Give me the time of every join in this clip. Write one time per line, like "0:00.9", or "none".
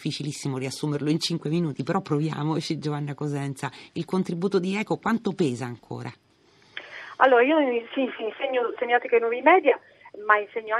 none